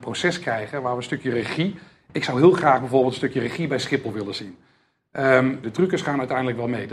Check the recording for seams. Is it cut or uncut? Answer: cut